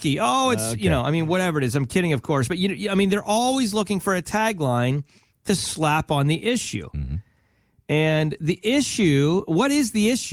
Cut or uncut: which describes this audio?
uncut